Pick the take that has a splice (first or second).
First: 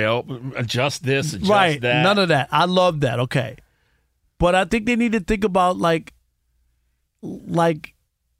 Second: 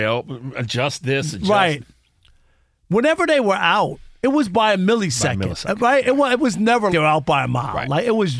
second